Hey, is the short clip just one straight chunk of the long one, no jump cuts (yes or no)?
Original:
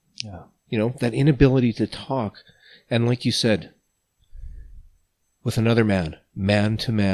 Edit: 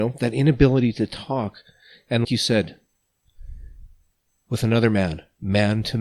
no